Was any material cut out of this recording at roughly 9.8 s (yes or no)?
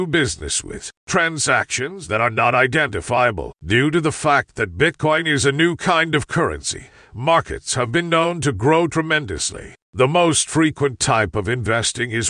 yes